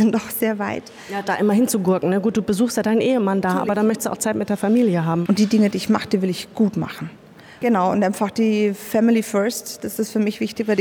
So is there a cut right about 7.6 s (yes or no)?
yes